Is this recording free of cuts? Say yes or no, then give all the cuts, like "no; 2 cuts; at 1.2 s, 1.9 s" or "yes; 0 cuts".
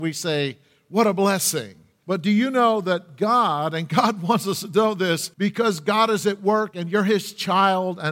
no; 2 cuts; at 2.0 s, 5.3 s